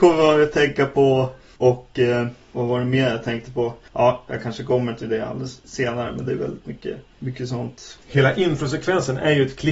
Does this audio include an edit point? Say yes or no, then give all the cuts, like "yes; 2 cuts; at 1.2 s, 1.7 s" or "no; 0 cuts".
no; 0 cuts